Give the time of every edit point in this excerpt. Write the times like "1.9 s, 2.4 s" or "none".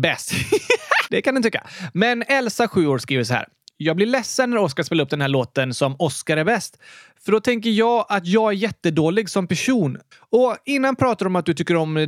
1.1 s, 10.1 s